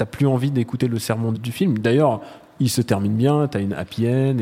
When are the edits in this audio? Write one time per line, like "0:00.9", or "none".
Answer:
0:01.3